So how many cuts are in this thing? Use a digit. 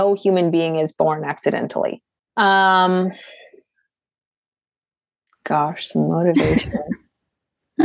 1